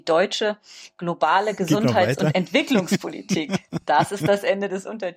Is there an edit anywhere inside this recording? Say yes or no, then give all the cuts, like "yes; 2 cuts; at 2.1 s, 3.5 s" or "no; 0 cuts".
no; 0 cuts